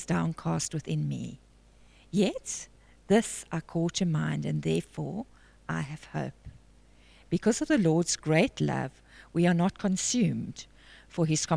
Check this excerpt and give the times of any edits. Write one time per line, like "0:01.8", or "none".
none